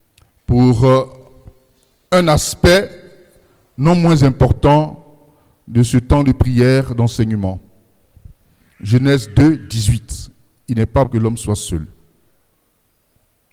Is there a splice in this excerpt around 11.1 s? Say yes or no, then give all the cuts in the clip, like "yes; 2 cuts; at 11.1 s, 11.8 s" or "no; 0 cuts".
yes; 1 cut; at 11.1 s